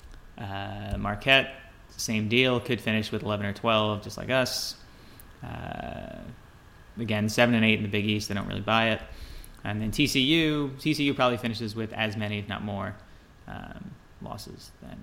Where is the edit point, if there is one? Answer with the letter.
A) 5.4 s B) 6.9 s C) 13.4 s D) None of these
B